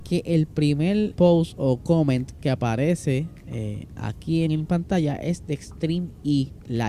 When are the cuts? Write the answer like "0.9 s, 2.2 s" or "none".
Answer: 1.1 s, 4.5 s